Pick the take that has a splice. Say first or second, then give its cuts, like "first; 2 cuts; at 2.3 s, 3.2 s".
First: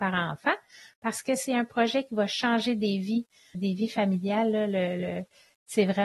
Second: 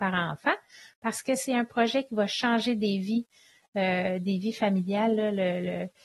first; 1 cut; at 3.5 s